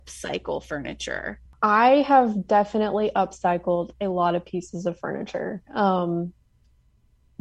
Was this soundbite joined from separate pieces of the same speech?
no; 0 cuts

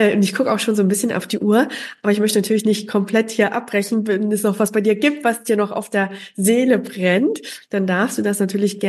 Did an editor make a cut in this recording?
no; 0 cuts

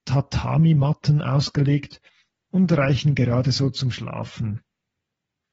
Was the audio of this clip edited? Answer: no; 0 cuts

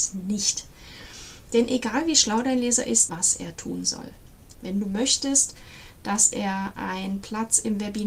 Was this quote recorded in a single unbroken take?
no; 2 cuts; at 3.1 s, 4.5 s

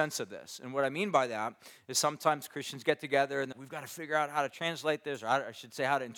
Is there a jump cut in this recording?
yes; 1 cut; at 3.5 s

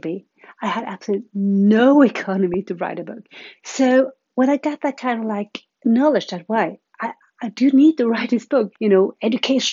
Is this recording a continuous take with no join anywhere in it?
no; 2 cuts; at 3.6 s, 8.7 s

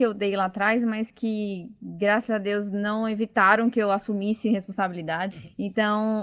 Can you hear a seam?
yes; 1 cut; at 5.3 s

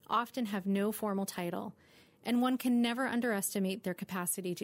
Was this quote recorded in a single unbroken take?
yes; 0 cuts

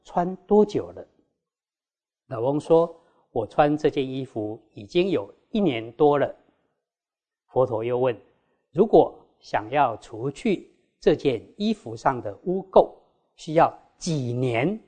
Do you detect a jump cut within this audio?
no; 0 cuts

